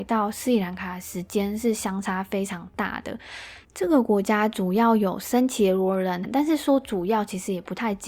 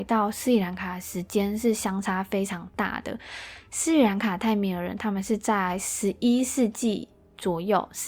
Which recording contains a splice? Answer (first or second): first